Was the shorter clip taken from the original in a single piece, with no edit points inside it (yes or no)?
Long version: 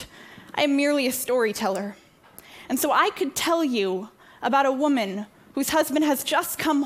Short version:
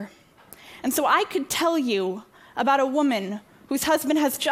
yes